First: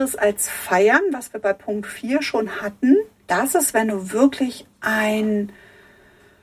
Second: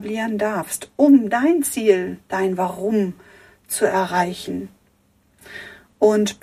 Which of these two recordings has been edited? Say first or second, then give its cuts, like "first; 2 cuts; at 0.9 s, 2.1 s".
first; 1 cut; at 3.2 s